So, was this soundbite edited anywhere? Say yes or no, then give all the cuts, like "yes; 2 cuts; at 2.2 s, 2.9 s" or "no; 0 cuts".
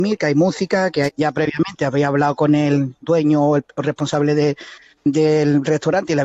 yes; 1 cut; at 1.1 s